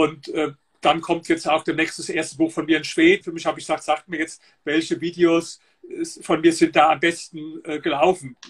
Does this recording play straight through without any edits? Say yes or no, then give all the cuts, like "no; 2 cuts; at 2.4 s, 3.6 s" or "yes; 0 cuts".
no; 1 cut; at 3.2 s